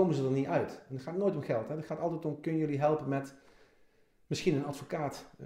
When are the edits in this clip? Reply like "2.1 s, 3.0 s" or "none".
none